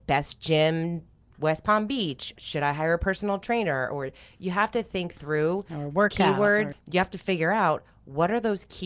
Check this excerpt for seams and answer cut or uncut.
cut